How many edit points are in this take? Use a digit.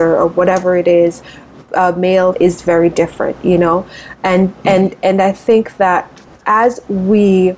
1